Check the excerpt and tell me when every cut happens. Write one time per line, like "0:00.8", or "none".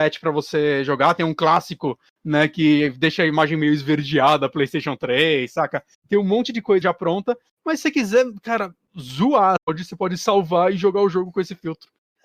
0:06.8
0:09.6